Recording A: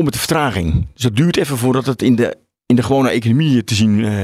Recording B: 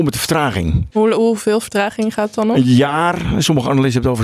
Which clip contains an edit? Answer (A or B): B